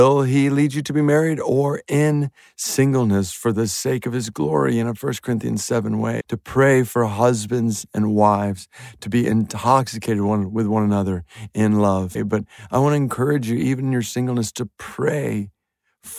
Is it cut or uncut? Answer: cut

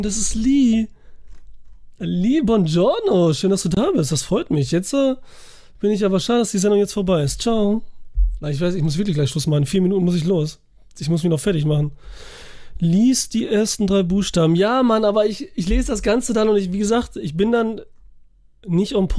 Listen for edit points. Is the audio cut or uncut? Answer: uncut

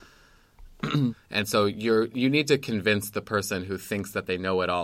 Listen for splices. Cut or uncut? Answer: cut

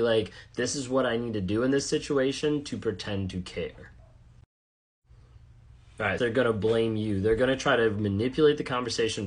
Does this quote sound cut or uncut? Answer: cut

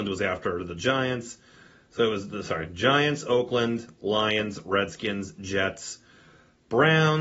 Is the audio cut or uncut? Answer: uncut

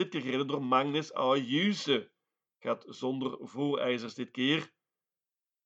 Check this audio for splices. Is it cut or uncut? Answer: uncut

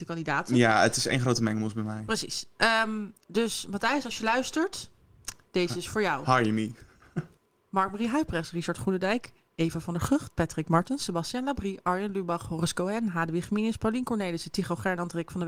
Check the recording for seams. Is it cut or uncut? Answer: uncut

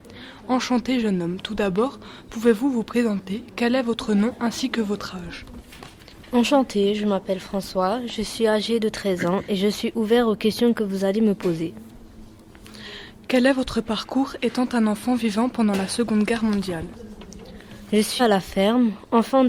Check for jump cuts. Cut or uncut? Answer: cut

